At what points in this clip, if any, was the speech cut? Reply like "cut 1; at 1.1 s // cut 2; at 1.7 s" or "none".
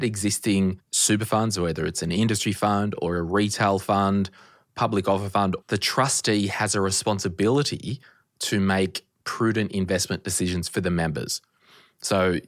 cut 1; at 5.6 s